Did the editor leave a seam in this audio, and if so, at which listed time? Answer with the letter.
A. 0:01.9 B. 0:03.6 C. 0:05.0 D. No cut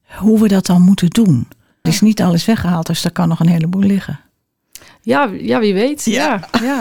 A